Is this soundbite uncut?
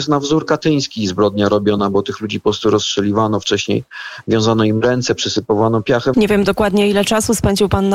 no; 1 cut; at 6.1 s

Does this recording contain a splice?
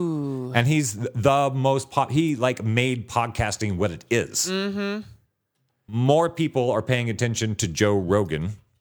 yes; 1 cut; at 5.9 s

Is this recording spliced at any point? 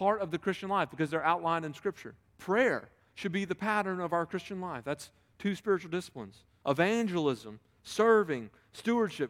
yes; 2 cuts; at 2.3 s, 6.6 s

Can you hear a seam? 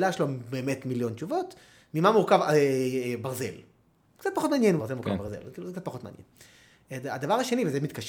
yes; 1 cut; at 4.8 s

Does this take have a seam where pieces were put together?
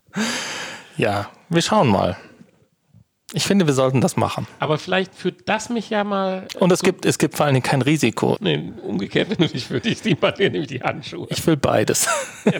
yes; 1 cut; at 8.4 s

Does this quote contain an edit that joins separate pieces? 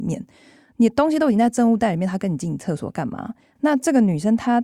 yes; 1 cut; at 3.6 s

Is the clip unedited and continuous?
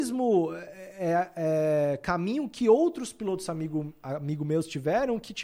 yes; 0 cuts

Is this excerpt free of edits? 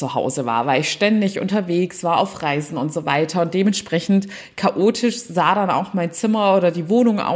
yes; 0 cuts

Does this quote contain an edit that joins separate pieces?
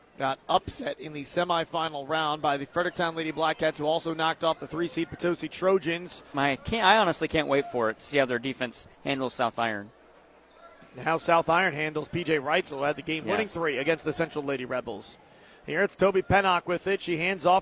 yes; 1 cut; at 6.3 s

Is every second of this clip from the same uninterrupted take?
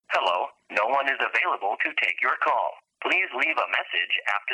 yes; 0 cuts

